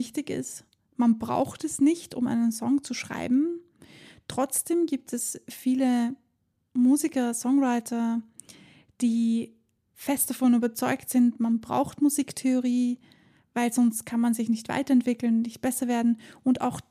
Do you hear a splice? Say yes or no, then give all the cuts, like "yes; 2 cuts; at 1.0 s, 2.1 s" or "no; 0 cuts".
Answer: no; 0 cuts